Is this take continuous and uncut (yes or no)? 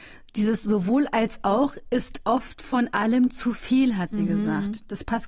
yes